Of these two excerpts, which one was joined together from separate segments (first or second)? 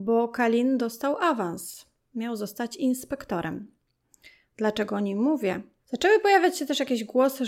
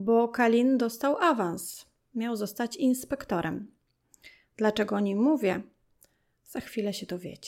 first